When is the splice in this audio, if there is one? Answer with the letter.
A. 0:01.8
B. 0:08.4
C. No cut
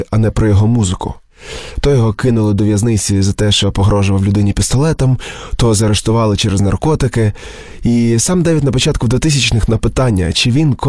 A